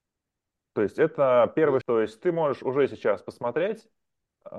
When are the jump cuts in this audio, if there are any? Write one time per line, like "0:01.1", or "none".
0:01.8

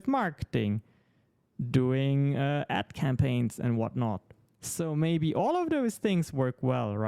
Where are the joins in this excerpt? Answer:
none

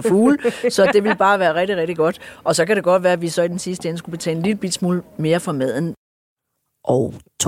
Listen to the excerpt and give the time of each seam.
none

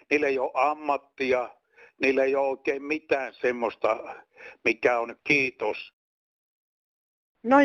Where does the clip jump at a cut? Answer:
0:05.2

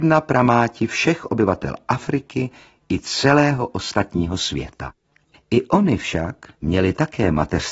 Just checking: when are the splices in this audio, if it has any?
0:05.3
0:06.5

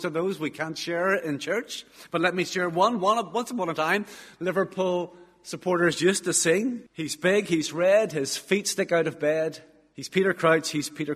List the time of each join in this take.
0:06.9

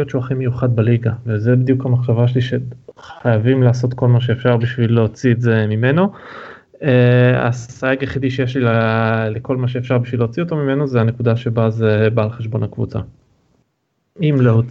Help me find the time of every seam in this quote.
none

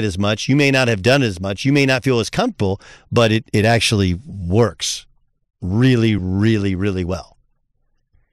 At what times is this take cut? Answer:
none

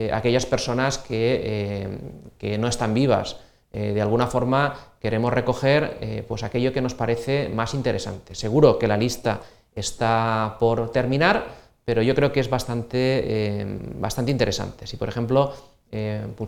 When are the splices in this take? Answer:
none

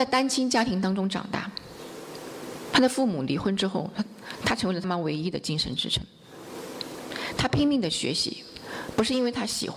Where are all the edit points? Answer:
0:04.8

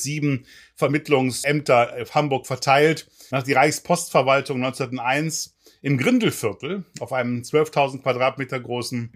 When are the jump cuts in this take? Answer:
0:03.3

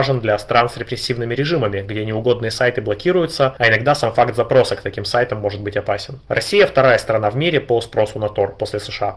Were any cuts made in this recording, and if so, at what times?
none

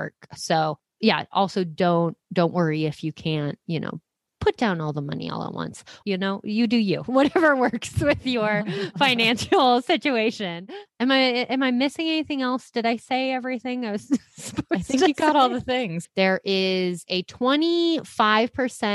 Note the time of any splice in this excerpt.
0:06.0
0:16.0

